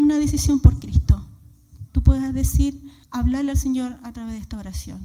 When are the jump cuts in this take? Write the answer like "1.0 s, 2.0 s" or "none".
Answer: 1.9 s, 3.0 s